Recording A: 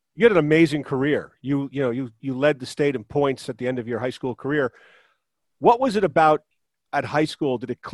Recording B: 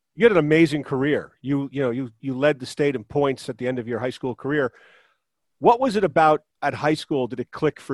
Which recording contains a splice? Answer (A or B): B